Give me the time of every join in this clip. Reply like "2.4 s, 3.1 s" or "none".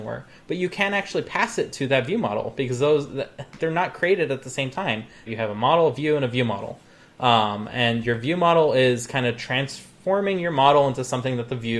3.6 s, 5.3 s